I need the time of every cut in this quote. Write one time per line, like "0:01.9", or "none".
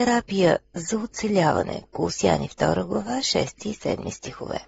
none

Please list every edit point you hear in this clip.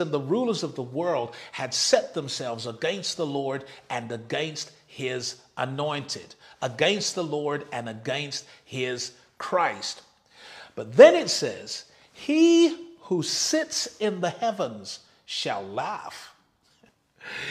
none

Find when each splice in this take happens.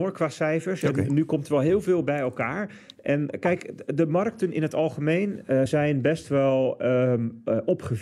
none

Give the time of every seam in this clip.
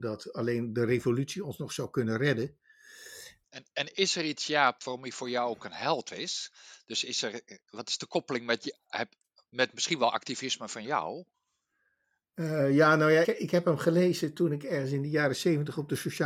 0:03.4
0:04.8
0:13.2

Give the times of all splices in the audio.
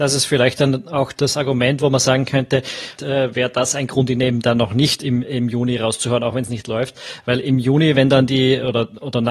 0:03.0

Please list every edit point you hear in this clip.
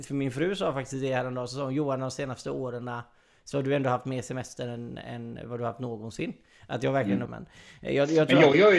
0:07.3

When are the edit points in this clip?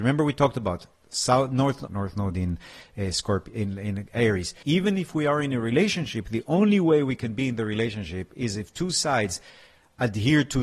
0:01.9
0:04.6

